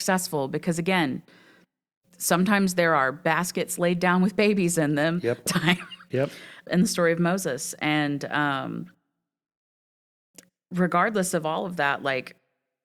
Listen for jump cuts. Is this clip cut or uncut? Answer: cut